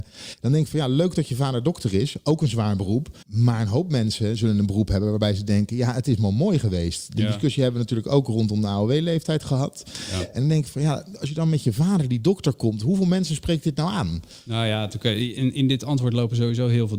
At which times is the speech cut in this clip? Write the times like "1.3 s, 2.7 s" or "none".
3.2 s